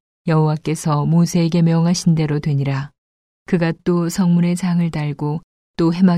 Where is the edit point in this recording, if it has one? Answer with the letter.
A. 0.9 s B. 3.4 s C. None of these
B